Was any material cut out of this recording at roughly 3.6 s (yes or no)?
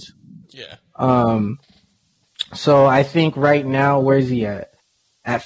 no